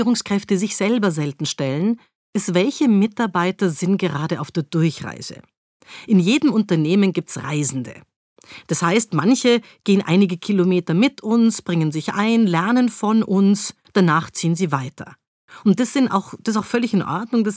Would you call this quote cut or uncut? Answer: uncut